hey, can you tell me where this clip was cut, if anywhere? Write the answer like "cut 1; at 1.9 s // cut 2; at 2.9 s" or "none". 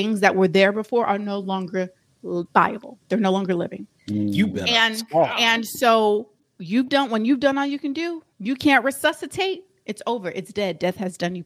cut 1; at 3.9 s